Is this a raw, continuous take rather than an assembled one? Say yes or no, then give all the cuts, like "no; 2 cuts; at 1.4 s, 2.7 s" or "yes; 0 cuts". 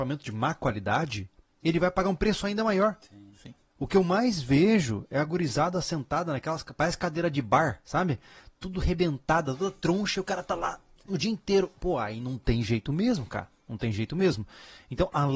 yes; 0 cuts